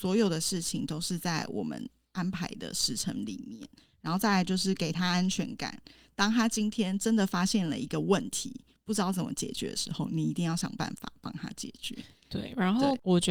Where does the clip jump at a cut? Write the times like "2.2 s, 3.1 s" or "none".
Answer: none